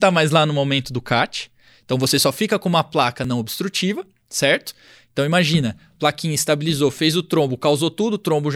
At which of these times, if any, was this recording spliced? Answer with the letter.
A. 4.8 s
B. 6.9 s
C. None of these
C